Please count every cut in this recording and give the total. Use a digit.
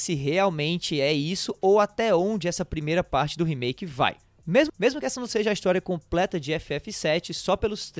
1